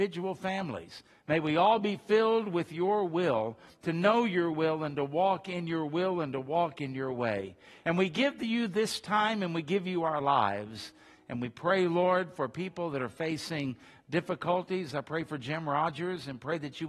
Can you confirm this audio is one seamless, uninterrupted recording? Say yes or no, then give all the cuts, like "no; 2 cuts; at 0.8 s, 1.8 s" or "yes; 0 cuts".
yes; 0 cuts